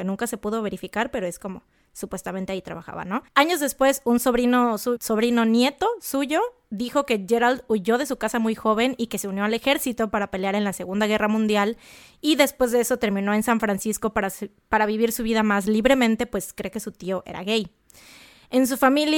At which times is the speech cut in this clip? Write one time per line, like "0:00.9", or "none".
0:03.3
0:05.0